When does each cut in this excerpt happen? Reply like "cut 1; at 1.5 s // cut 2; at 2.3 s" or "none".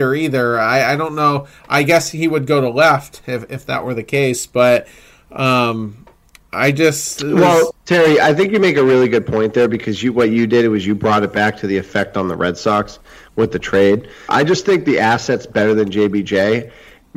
cut 1; at 14.3 s